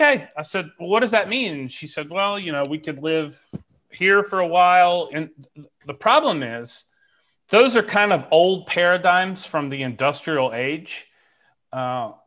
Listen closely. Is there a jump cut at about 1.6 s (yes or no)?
no